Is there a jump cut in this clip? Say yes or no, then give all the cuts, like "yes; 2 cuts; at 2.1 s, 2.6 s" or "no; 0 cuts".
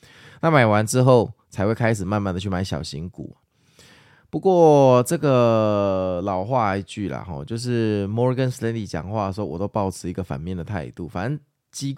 no; 0 cuts